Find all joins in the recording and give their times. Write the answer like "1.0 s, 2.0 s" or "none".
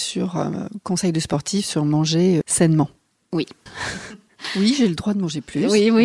2.4 s, 3.7 s